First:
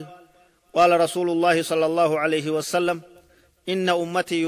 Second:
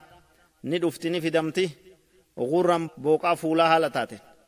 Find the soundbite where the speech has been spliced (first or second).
second